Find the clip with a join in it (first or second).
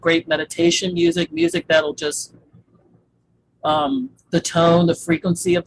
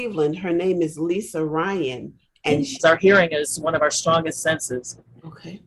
second